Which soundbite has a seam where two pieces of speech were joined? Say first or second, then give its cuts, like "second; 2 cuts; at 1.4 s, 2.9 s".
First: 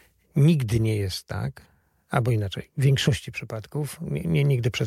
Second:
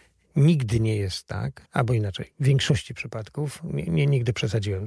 second; 1 cut; at 1.7 s